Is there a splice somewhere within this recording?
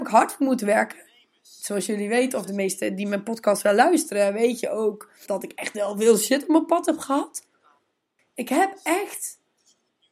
yes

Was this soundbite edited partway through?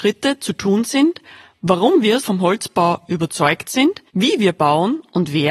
yes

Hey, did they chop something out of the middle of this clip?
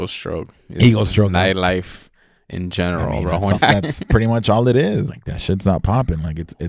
yes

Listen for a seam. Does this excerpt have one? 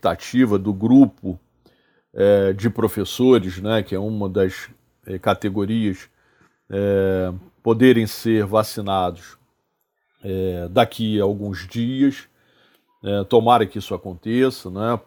no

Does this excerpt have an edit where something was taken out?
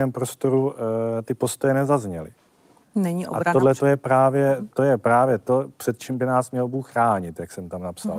yes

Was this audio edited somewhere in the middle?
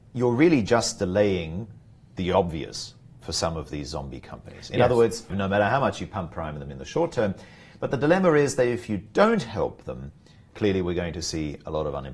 yes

